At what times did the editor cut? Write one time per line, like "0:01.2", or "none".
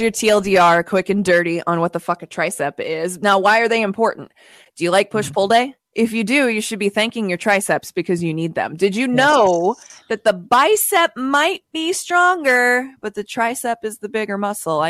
none

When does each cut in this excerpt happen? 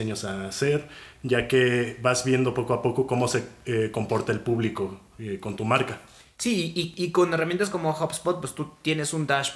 none

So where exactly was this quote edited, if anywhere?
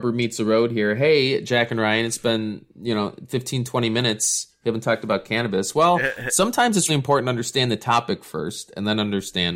0:06.9

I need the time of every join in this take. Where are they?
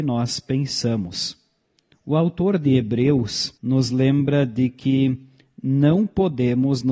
0:01.9
0:03.6

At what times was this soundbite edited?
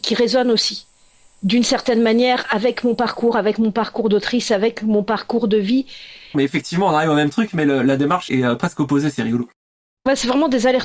0:06.3
0:08.3

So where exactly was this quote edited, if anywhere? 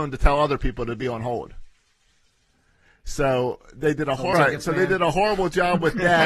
0:04.3

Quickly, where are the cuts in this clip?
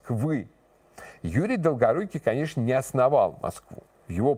none

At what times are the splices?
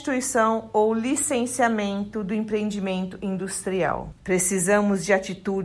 0:04.2

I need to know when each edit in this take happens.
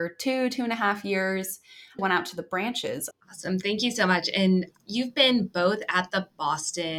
0:02.0
0:03.1

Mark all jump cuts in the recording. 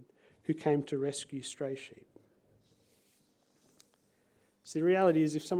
none

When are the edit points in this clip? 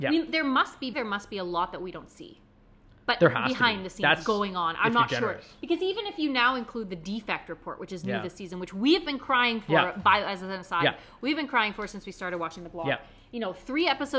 0:00.9

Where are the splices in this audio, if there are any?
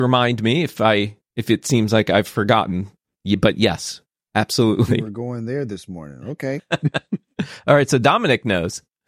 0:06.6

